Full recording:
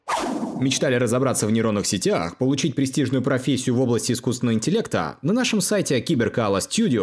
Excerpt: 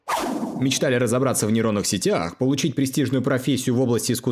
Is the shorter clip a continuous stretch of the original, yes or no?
yes